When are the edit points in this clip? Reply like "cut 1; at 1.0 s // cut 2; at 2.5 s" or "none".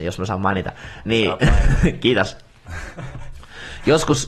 none